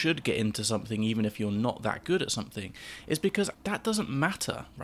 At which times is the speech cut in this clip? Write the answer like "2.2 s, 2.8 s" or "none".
3.5 s